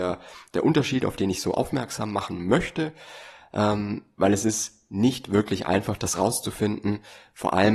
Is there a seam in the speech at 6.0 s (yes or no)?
no